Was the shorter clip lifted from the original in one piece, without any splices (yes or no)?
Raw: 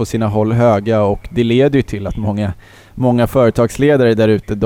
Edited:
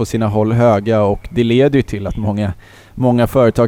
yes